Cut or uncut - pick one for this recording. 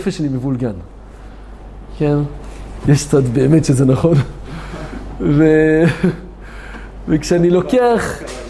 cut